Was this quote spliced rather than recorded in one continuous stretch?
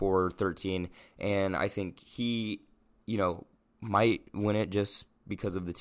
no; 0 cuts

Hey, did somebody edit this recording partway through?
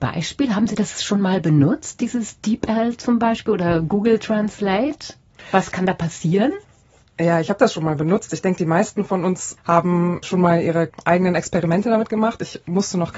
no; 0 cuts

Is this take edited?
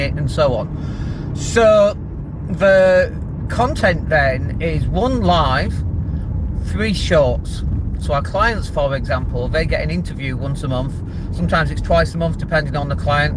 yes; 1 cut; at 8.0 s

